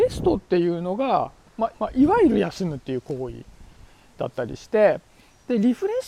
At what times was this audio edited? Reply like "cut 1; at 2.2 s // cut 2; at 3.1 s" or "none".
cut 1; at 1.7 s